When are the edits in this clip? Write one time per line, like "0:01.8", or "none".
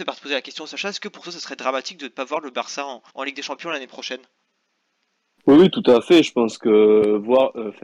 0:03.1